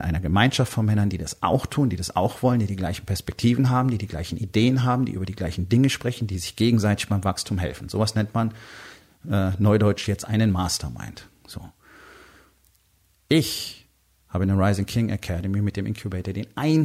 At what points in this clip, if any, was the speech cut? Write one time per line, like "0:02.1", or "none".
none